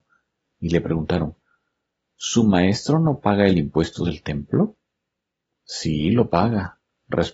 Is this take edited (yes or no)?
no